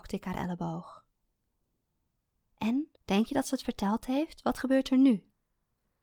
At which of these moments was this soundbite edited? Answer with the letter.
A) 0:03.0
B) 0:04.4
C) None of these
A